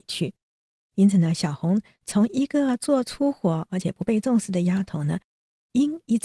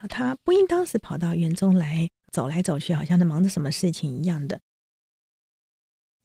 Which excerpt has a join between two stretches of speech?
second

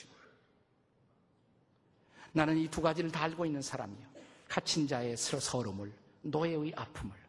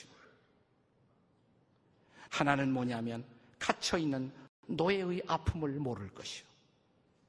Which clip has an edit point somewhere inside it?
second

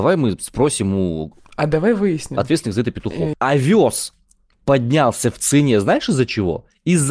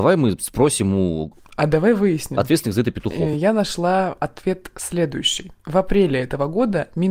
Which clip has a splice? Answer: first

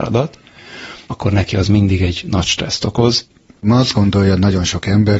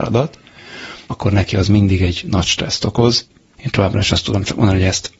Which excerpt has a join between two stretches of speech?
first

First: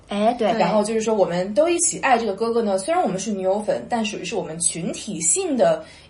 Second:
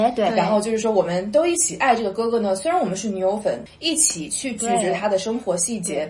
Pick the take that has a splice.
second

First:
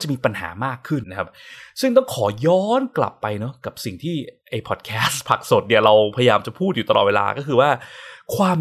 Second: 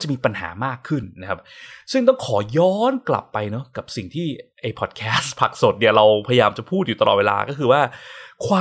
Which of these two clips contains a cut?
first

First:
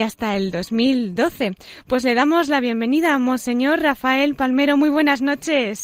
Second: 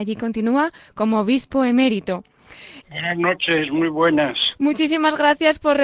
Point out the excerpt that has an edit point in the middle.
second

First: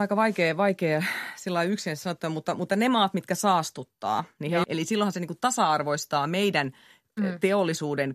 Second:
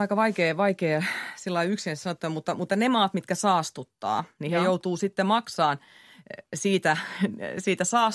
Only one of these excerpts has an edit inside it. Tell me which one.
first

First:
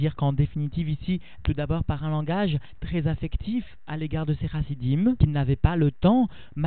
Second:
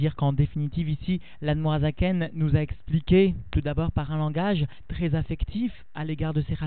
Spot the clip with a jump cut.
first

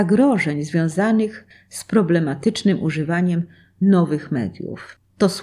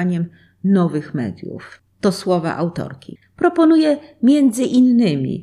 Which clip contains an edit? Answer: second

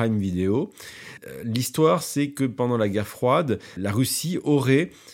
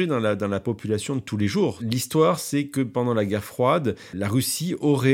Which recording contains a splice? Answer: second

